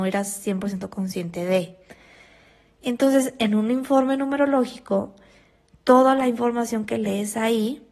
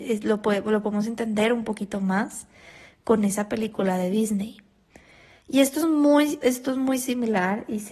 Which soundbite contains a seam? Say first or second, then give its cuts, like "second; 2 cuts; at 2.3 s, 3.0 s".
second; 2 cuts; at 5.3 s, 6.4 s